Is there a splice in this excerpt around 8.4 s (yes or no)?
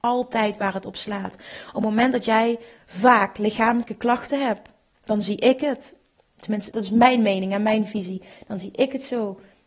no